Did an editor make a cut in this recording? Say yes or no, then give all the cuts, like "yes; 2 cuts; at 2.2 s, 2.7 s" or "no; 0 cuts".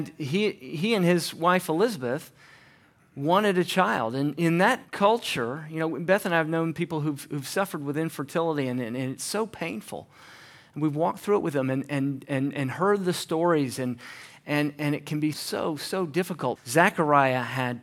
yes; 2 cuts; at 15.3 s, 16.6 s